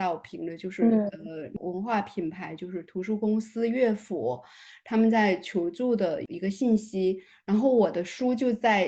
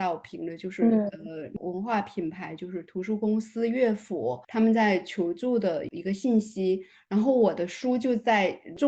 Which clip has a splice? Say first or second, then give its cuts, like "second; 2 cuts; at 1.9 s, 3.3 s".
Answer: second; 1 cut; at 4.4 s